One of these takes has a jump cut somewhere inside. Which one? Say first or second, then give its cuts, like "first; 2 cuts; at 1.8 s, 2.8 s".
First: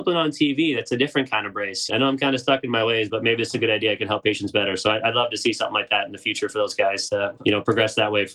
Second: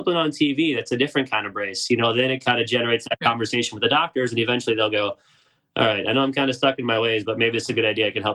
first; 2 cuts; at 1.9 s, 7.4 s